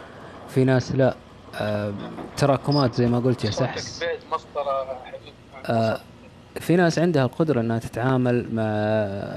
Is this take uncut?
no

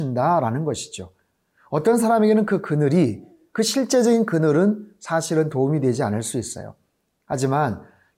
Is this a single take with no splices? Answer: yes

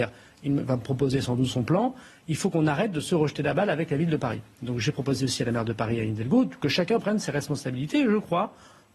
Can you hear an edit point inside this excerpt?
no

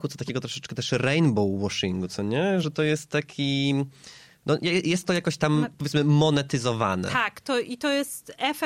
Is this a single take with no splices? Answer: yes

